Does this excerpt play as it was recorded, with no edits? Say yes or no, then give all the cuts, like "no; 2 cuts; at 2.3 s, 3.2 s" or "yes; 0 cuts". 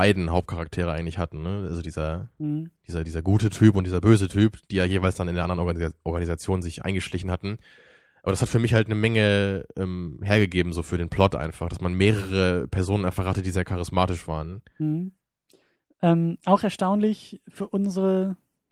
yes; 0 cuts